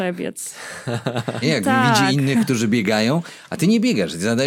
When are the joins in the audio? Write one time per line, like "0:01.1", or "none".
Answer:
0:01.4